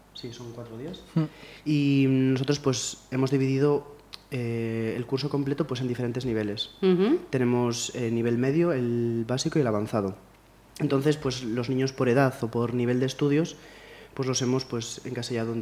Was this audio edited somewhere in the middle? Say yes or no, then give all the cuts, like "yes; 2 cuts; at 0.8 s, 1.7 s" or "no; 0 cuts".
no; 0 cuts